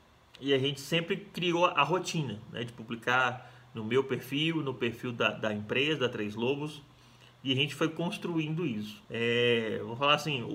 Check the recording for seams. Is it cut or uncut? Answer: cut